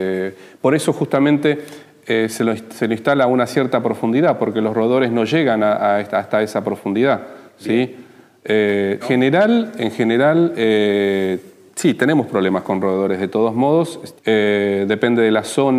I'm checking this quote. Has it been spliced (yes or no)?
yes